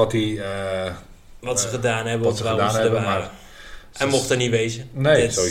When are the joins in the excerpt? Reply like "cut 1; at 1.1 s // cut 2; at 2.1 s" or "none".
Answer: none

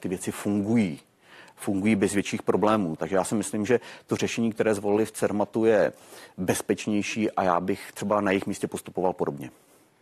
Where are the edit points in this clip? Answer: cut 1; at 3.0 s

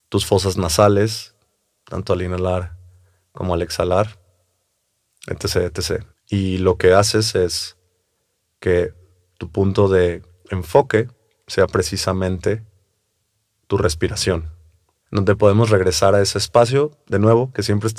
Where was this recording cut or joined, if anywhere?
cut 1; at 6.1 s // cut 2; at 15.0 s

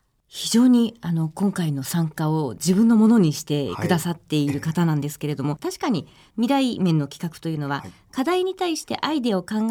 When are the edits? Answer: cut 1; at 5.6 s

